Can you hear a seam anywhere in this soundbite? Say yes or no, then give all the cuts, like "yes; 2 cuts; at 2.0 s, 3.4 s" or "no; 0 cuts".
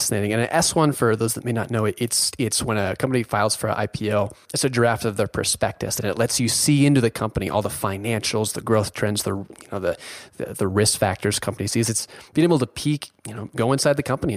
no; 0 cuts